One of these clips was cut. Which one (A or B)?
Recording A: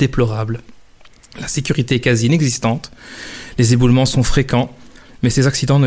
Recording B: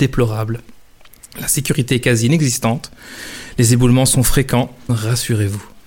B